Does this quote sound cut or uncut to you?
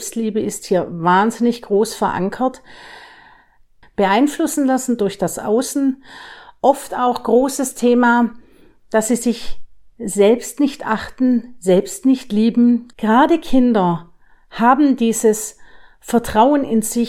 cut